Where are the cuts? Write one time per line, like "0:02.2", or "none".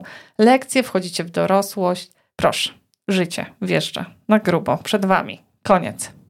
none